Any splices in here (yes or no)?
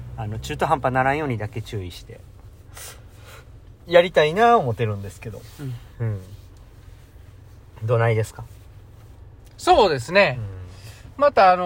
no